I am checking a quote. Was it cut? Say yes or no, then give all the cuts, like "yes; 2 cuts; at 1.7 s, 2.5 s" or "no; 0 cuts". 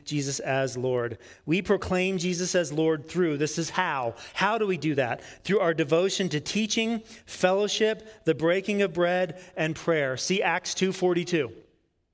no; 0 cuts